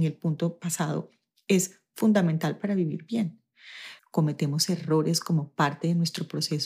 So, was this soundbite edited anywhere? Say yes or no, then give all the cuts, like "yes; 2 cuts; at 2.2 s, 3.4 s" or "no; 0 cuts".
yes; 1 cut; at 4.0 s